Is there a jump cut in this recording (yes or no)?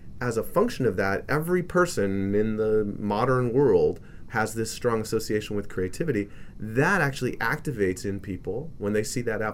yes